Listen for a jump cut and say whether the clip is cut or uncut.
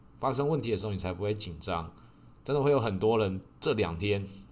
cut